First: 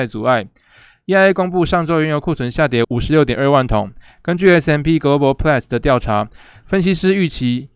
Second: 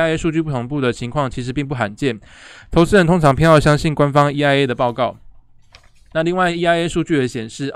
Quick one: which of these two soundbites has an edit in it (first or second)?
first